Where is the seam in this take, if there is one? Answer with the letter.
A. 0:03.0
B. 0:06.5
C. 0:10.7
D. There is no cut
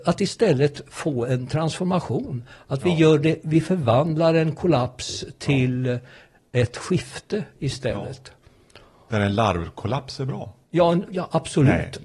D